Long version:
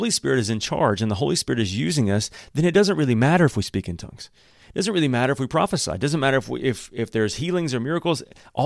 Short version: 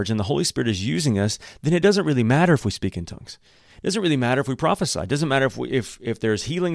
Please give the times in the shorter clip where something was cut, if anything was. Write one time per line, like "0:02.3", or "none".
none